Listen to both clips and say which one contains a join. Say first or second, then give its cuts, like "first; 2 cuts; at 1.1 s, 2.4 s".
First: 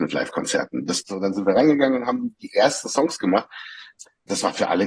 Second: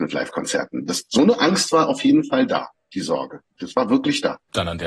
first; 1 cut; at 1.0 s